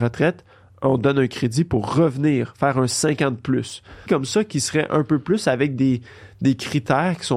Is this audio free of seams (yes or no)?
no